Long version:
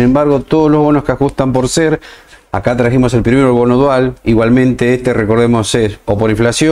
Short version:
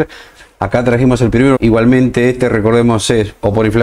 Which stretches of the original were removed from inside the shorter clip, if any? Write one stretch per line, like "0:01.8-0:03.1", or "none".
0:03.5-0:04.2